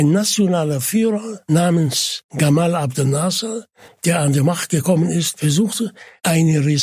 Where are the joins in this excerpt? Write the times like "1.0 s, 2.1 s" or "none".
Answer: 3.9 s